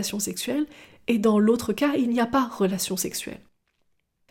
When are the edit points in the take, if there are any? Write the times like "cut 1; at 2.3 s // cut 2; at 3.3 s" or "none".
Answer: none